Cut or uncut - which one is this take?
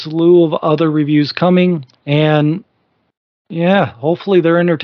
cut